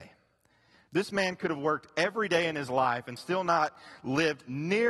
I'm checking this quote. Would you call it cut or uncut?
uncut